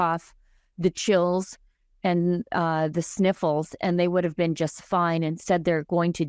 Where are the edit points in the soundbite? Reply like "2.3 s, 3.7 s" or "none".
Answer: none